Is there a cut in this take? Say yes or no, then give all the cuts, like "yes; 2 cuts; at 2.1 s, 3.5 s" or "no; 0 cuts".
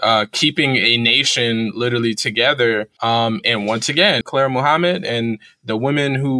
yes; 2 cuts; at 3.0 s, 4.2 s